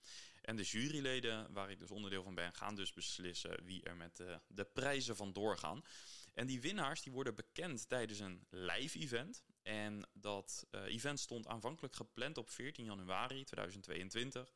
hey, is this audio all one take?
yes; 0 cuts

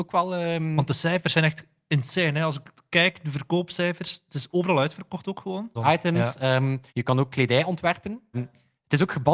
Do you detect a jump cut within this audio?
yes; 3 cuts; at 5.8 s, 6.9 s, 8.3 s

